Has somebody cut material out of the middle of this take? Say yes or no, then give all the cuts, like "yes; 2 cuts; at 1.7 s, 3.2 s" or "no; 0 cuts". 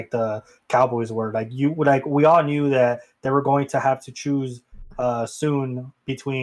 no; 0 cuts